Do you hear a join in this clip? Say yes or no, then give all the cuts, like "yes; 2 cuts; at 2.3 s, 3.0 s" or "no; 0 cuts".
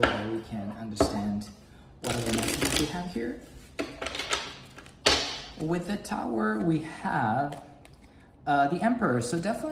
no; 0 cuts